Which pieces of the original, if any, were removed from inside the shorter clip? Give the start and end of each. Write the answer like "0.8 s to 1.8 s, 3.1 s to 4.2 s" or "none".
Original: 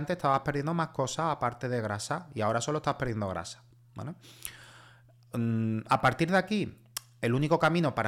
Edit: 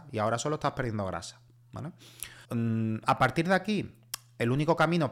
4.7 s to 5.3 s